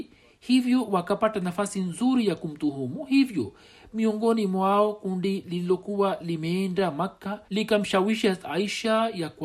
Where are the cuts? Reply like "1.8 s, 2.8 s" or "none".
7.5 s